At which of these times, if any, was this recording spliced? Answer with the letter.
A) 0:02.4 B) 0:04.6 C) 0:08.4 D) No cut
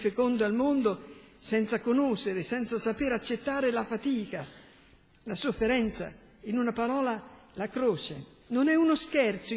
C